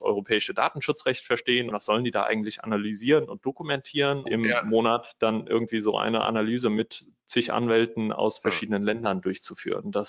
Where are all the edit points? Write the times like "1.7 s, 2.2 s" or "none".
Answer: 1.7 s, 4.3 s